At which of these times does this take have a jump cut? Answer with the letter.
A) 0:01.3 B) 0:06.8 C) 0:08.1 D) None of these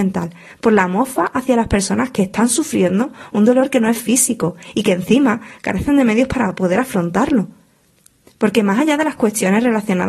D